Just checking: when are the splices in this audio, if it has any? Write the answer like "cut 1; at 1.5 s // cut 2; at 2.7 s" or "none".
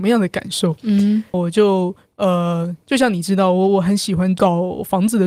cut 1; at 1.3 s